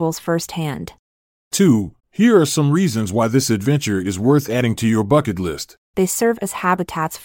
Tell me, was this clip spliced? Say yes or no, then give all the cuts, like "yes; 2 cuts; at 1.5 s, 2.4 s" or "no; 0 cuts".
yes; 2 cuts; at 2.0 s, 5.9 s